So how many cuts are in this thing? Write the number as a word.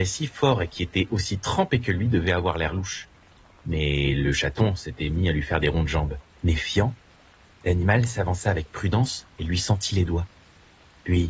two